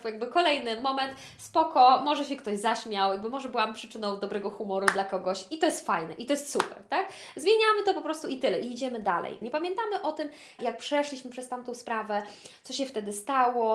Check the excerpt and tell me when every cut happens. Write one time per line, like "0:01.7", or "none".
0:09.4
0:10.6